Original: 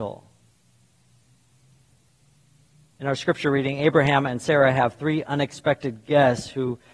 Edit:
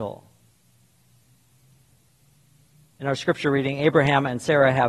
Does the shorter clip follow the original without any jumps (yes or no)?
yes